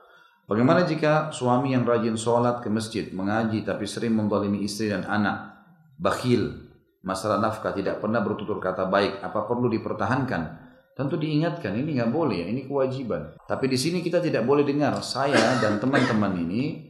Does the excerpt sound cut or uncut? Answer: cut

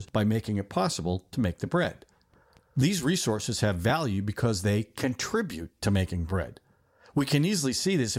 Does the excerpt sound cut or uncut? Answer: uncut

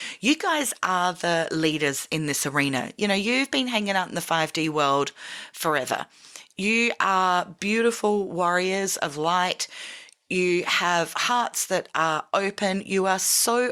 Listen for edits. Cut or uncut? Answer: uncut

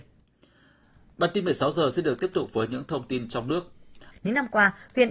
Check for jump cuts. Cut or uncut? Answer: cut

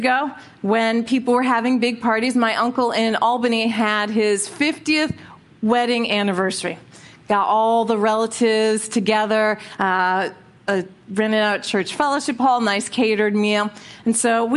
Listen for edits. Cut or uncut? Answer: uncut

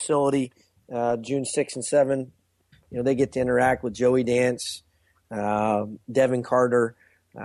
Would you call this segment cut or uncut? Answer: cut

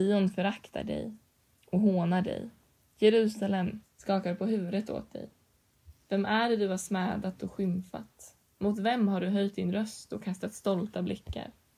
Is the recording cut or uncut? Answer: cut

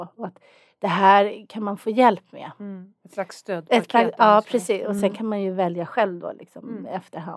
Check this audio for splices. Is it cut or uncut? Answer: uncut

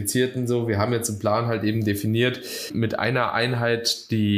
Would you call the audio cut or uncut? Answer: uncut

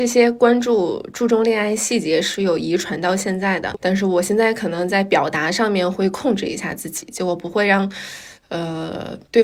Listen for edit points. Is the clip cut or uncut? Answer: cut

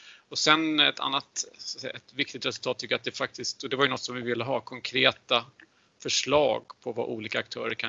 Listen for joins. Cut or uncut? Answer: uncut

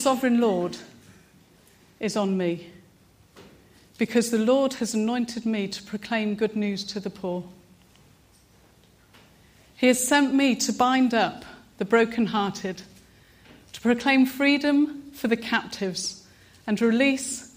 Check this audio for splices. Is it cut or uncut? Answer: uncut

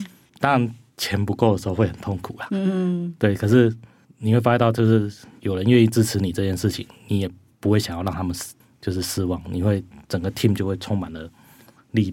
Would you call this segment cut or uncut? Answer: uncut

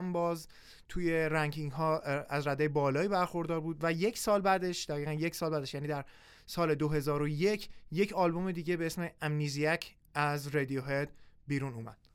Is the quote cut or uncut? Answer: uncut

